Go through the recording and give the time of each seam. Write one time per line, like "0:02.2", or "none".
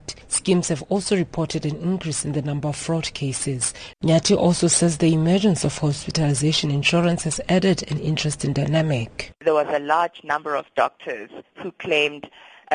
0:03.9